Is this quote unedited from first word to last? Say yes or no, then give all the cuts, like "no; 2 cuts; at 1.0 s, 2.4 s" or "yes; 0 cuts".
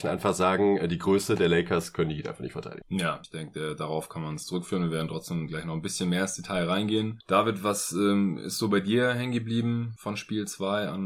yes; 0 cuts